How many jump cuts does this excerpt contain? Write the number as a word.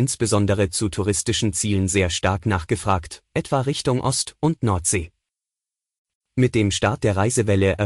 one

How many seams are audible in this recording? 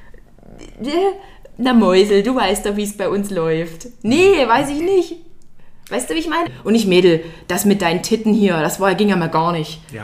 one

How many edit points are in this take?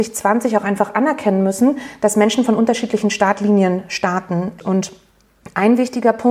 one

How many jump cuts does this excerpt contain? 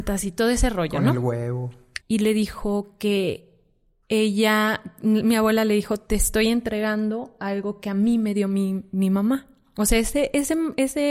one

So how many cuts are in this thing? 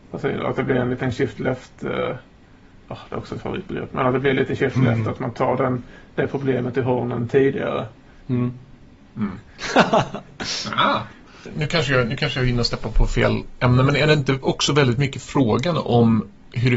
two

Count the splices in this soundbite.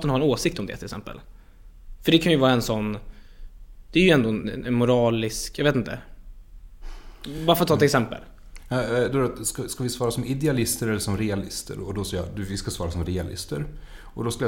zero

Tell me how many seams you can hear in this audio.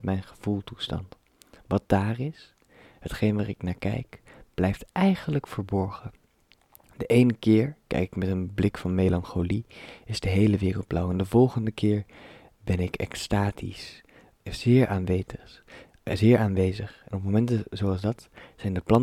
one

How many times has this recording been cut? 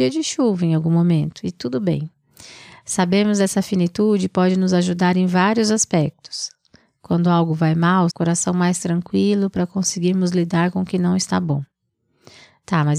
one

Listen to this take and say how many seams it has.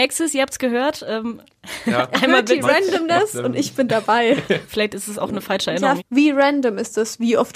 two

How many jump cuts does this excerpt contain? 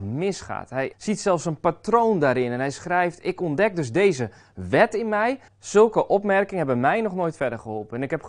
two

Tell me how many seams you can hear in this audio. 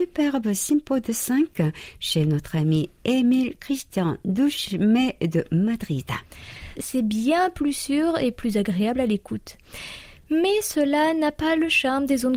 one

